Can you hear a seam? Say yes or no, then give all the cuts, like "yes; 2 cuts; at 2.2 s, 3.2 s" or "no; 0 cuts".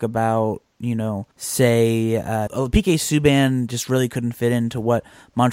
yes; 2 cuts; at 1.3 s, 2.5 s